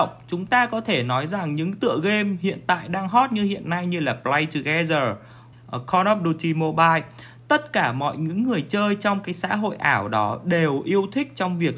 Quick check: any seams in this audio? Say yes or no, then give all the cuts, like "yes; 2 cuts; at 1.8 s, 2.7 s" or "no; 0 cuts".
yes; 1 cut; at 5.5 s